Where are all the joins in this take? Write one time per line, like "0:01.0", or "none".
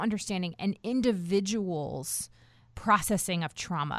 none